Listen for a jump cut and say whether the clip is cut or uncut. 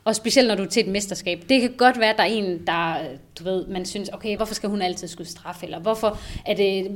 cut